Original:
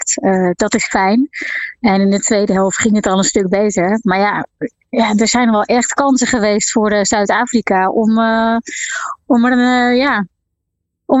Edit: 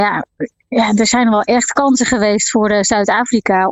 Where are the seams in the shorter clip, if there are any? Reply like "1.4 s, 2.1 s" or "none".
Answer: none